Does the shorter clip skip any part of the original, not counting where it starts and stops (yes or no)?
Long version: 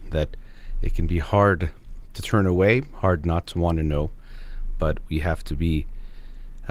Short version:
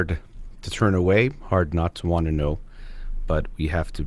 no